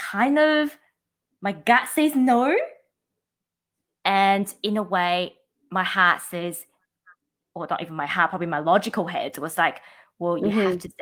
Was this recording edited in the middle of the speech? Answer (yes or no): no